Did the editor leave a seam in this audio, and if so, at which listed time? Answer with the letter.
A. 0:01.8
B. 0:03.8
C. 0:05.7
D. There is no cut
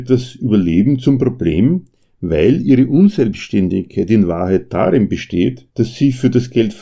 C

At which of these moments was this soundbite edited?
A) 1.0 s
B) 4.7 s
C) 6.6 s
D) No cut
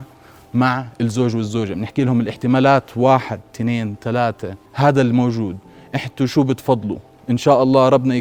B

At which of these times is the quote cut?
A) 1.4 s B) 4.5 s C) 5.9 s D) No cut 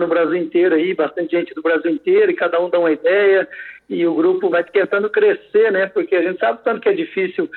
B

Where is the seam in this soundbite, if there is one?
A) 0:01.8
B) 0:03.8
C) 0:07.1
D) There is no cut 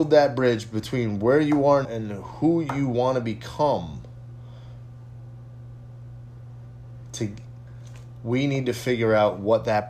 A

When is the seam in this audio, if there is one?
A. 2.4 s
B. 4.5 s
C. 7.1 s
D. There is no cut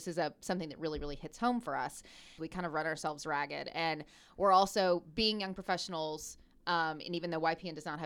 A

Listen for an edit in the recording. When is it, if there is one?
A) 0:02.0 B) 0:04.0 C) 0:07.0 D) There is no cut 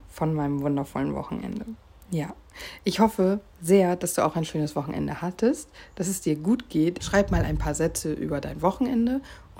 C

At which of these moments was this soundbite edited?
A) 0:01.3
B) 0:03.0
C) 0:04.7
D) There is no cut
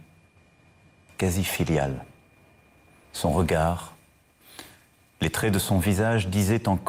B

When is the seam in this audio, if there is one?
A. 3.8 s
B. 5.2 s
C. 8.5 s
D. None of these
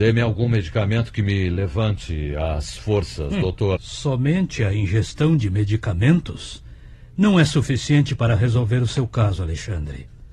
A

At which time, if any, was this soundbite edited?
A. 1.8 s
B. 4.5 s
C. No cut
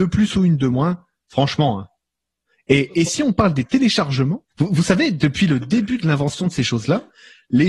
B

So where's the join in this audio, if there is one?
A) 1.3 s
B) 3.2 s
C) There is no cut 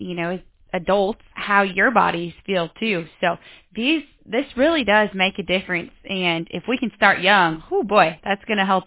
A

